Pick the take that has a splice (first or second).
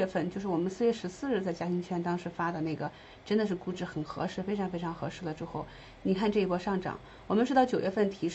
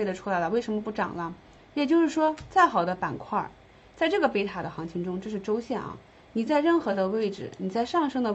second